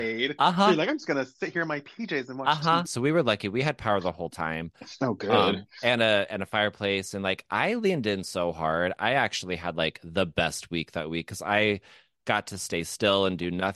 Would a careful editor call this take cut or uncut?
cut